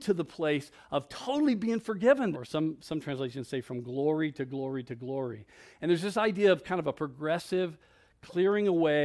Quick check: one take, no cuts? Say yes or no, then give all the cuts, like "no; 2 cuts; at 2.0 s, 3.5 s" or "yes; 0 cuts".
no; 1 cut; at 2.3 s